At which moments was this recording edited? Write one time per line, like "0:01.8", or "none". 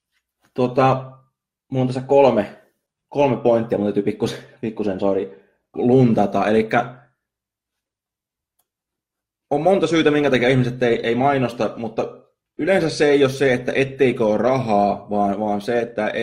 0:05.7